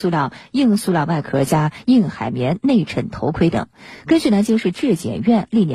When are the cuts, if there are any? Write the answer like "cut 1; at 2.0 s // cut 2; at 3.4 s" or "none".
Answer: none